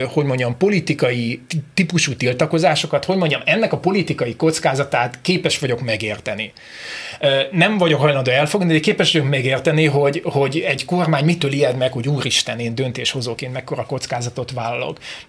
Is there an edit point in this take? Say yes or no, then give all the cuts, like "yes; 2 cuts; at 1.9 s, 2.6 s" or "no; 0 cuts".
no; 0 cuts